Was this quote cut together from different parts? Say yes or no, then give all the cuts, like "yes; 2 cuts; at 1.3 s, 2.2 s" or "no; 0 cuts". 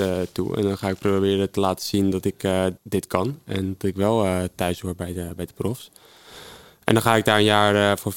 yes; 1 cut; at 2.8 s